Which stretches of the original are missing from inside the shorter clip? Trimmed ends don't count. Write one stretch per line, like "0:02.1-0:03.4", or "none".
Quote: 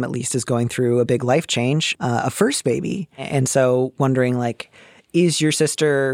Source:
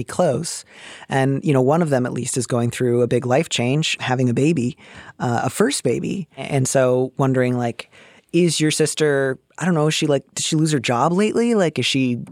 0:04.0-0:05.1